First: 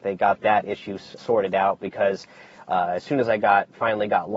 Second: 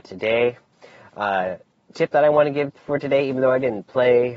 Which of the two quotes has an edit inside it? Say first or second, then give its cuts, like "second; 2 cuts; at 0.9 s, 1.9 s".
first; 1 cut; at 1.2 s